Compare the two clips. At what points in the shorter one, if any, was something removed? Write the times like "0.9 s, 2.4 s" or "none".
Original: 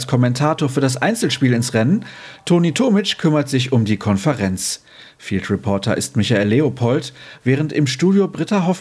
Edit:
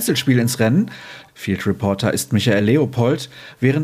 1.3 s